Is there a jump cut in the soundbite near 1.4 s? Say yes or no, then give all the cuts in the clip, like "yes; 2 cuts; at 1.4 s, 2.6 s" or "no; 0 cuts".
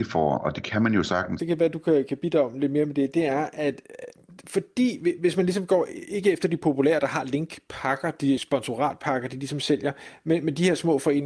yes; 2 cuts; at 1.4 s, 8.4 s